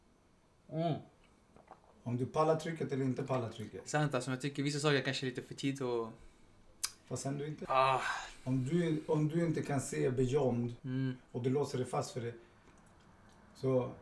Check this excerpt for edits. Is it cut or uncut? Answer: cut